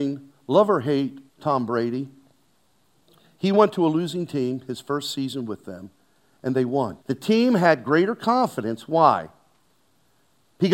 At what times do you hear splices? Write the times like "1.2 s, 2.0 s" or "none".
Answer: 1.3 s, 7.0 s